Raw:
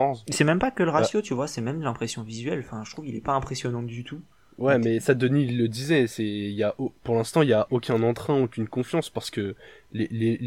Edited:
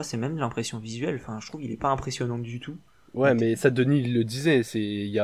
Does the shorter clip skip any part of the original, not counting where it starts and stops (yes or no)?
no